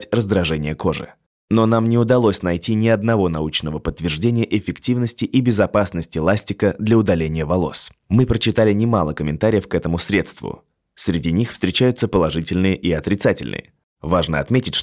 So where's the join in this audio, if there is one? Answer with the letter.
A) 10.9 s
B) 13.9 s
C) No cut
C